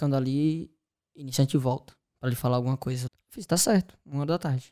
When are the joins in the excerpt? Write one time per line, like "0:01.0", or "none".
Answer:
0:03.1